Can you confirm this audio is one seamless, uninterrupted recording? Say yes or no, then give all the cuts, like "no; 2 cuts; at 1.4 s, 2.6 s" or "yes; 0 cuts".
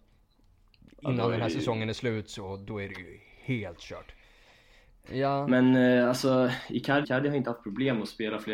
no; 2 cuts; at 5.1 s, 7.0 s